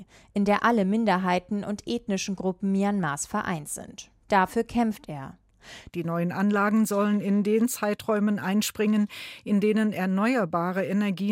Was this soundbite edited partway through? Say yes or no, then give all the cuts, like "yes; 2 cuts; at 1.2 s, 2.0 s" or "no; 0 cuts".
yes; 1 cut; at 5.9 s